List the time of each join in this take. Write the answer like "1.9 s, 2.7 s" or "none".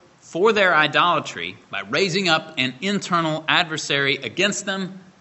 1.6 s